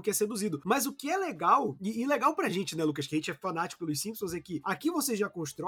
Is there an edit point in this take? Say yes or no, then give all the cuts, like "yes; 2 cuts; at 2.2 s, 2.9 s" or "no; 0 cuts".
no; 0 cuts